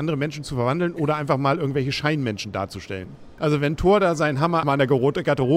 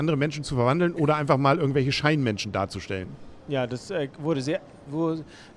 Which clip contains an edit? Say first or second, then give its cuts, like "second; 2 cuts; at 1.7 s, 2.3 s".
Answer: first; 2 cuts; at 3.4 s, 4.6 s